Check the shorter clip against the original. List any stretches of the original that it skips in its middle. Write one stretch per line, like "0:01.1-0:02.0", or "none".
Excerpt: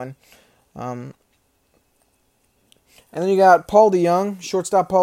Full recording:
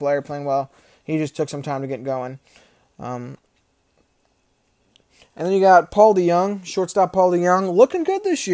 none